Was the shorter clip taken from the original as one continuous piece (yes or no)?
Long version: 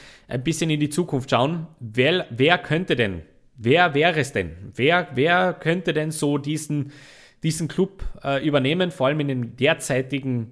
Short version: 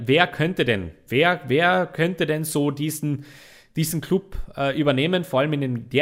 no